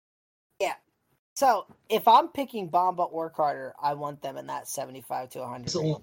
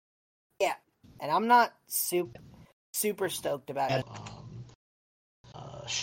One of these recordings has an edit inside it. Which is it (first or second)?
second